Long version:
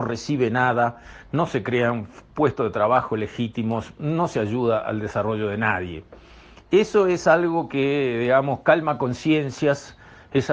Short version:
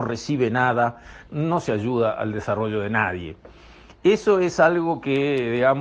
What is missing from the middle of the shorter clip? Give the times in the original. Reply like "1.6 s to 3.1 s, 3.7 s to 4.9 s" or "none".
1.3 s to 3.9 s